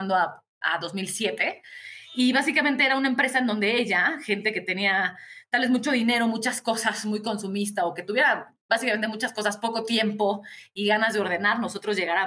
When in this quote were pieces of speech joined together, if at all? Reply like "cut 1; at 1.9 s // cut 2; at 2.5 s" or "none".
none